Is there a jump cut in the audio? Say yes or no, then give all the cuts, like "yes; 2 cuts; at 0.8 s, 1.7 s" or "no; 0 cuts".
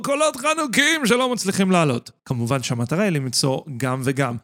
yes; 1 cut; at 2.2 s